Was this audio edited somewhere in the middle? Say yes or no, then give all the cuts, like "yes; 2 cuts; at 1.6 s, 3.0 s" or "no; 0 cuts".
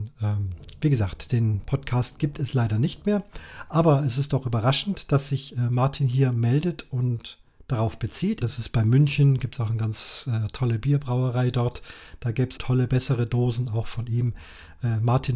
yes; 2 cuts; at 8.4 s, 12.6 s